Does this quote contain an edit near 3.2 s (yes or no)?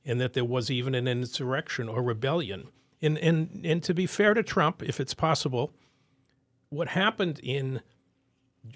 no